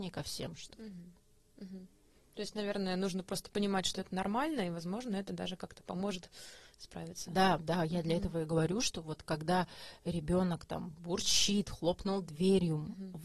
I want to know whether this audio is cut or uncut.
uncut